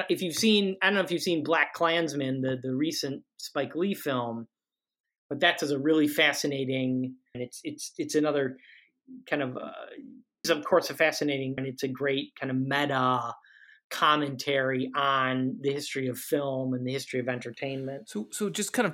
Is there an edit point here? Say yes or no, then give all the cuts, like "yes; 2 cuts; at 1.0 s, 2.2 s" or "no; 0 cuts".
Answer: yes; 3 cuts; at 7.3 s, 10.4 s, 11.6 s